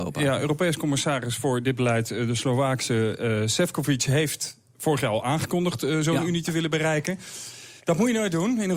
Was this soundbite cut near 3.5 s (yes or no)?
no